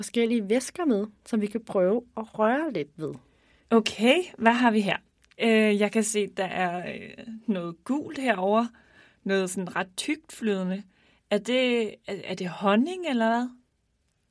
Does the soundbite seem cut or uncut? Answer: uncut